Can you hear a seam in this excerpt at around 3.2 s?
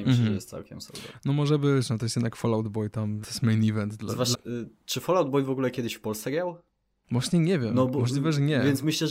yes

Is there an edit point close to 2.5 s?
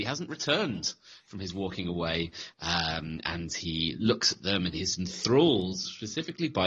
yes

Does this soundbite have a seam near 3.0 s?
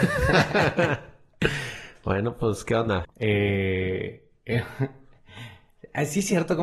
yes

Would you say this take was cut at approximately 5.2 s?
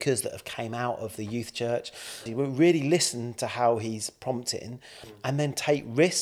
no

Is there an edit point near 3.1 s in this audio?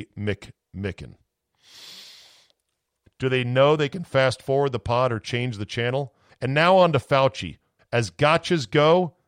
yes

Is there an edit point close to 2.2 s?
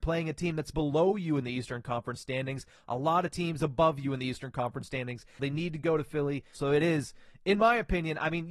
no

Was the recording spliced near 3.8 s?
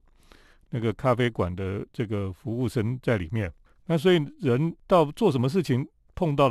yes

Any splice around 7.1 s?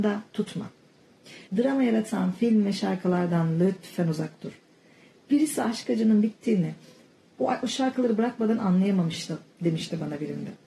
no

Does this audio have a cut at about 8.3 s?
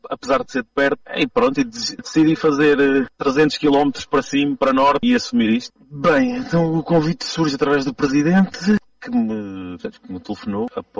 no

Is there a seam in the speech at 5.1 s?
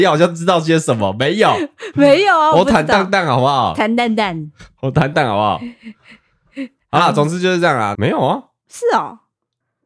yes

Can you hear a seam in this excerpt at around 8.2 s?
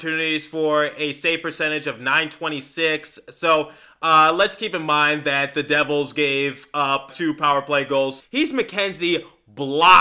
yes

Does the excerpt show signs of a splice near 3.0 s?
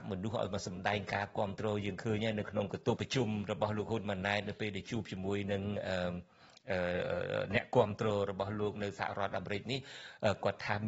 yes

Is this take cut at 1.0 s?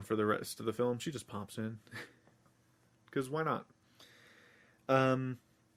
no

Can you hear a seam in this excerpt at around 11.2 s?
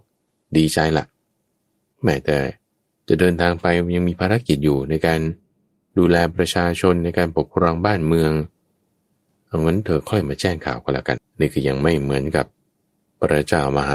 yes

